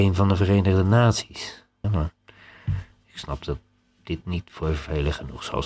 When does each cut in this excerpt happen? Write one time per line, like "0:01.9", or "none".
0:01.8